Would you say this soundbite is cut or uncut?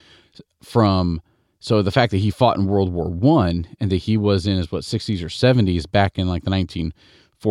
uncut